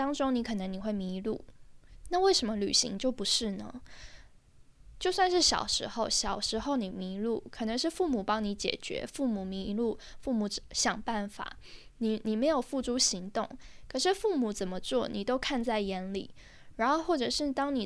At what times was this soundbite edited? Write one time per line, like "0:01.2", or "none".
0:02.0
0:04.9